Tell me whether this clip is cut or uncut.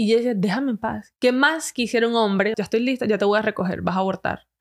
cut